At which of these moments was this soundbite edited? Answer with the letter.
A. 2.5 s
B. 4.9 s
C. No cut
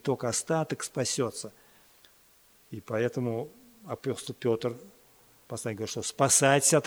A